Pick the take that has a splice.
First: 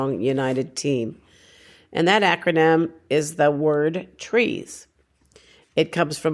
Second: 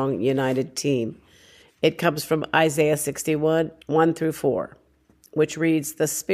second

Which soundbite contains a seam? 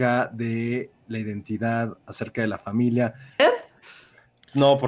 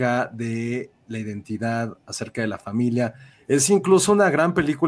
first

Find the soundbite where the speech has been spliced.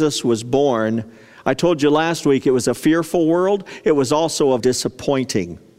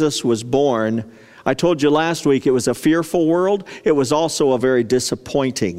first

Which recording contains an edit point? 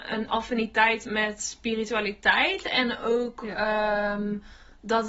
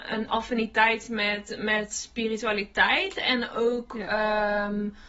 first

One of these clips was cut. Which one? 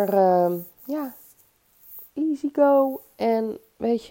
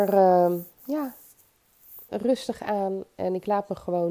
second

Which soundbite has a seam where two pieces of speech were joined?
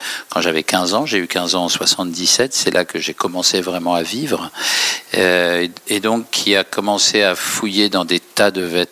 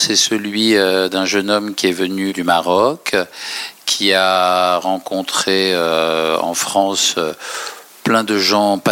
second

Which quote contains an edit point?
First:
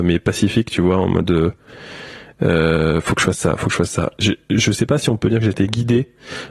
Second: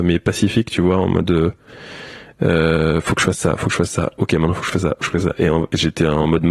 first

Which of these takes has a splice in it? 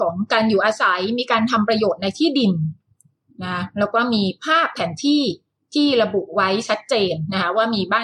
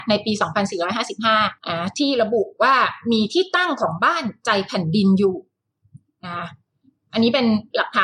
second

